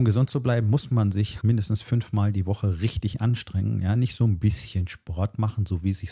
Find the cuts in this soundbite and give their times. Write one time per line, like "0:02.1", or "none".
0:01.4

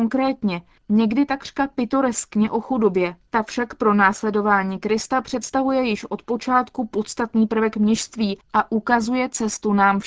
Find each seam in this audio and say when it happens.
none

